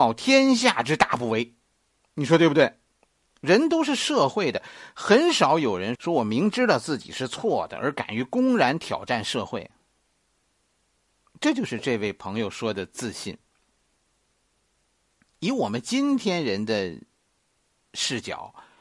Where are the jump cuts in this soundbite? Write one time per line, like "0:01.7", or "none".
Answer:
0:06.0